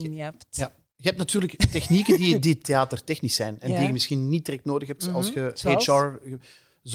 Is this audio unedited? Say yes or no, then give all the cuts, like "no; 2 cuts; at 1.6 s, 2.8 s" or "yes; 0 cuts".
yes; 0 cuts